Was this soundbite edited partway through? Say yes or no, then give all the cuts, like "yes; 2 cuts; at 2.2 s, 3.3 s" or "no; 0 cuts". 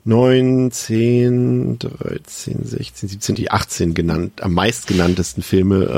yes; 1 cut; at 3.4 s